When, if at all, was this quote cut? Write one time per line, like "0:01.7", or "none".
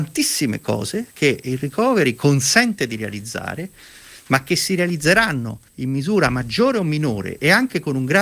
0:01.1
0:05.7

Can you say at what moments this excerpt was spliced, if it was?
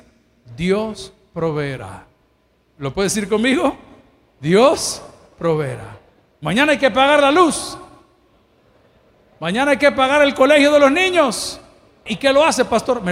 0:12.1

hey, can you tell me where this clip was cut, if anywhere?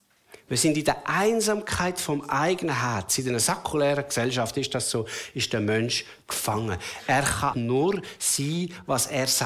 0:07.5

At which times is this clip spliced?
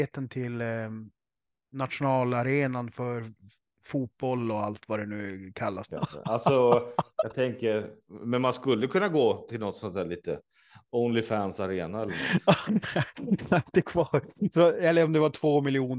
0:05.9
0:12.7

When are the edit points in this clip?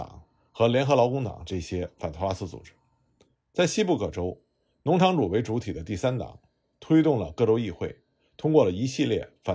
none

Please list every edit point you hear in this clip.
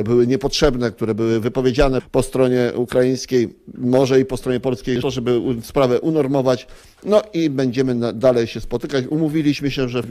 0:05.0

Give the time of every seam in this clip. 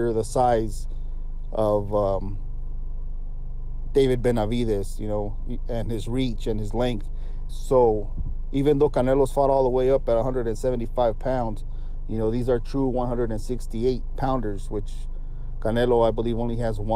0:07.5

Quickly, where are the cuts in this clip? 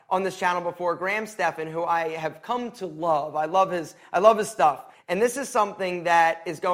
0:04.9

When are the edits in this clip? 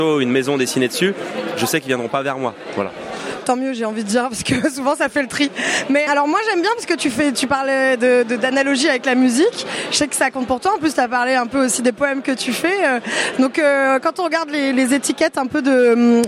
0:06.1

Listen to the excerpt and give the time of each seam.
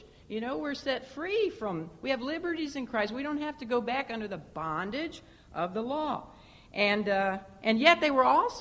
none

